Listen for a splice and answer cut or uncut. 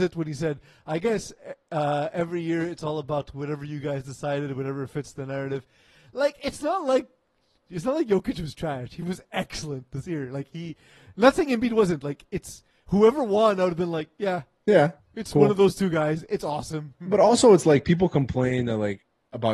uncut